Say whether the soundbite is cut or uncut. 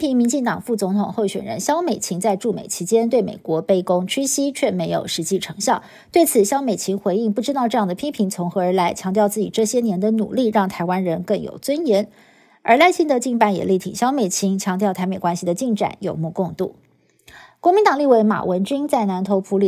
uncut